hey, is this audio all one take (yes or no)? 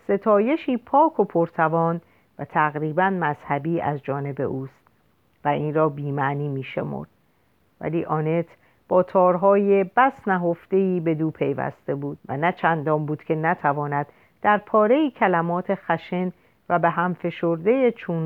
no